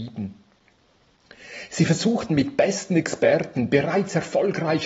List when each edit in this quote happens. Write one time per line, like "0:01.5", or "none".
none